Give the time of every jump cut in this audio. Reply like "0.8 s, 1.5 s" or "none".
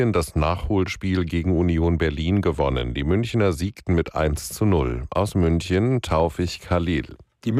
none